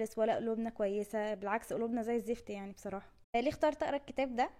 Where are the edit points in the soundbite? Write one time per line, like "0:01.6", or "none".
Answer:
0:03.2